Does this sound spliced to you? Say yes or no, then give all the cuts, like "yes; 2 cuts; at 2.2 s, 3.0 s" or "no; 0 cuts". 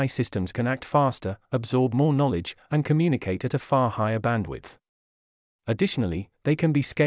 no; 0 cuts